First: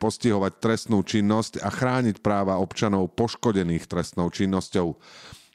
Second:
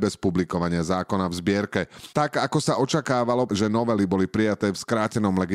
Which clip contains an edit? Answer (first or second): second